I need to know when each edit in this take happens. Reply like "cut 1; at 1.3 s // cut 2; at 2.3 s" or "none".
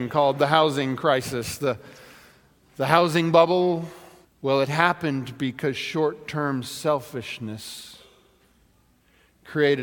cut 1; at 4.2 s